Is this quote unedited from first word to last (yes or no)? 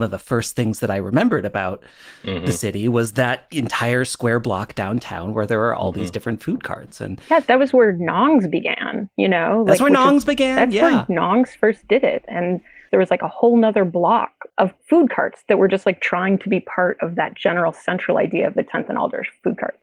yes